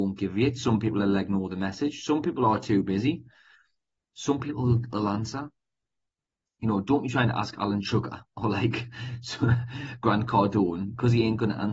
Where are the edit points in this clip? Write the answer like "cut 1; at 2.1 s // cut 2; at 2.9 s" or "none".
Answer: none